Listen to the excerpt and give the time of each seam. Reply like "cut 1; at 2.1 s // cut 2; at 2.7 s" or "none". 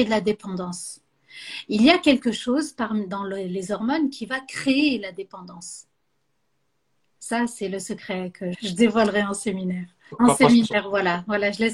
cut 1; at 8.5 s // cut 2; at 10.1 s